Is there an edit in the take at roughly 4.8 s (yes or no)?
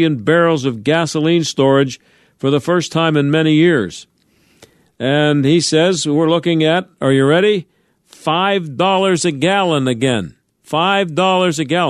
yes